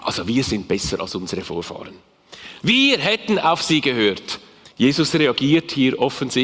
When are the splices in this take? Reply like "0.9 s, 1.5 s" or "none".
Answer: 2.6 s, 4.6 s